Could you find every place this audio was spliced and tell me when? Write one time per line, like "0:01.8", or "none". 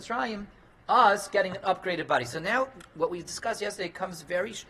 none